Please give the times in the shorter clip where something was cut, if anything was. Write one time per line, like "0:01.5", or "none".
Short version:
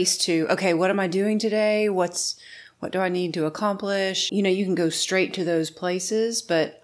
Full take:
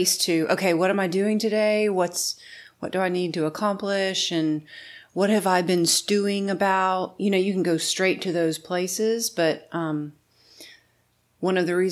0:04.3